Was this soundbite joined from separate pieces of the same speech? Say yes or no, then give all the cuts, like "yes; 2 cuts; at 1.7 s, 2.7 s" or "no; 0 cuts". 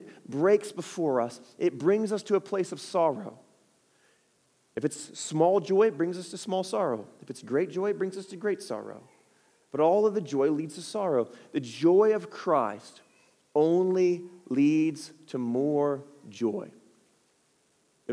no; 0 cuts